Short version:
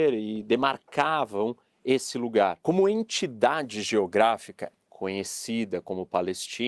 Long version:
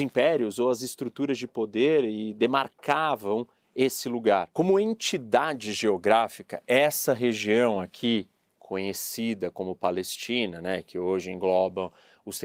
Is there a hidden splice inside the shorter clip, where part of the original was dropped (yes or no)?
yes